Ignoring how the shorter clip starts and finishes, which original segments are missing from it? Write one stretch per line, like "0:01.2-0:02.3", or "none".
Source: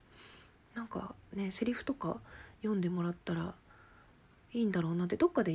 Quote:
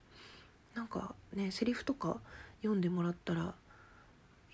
none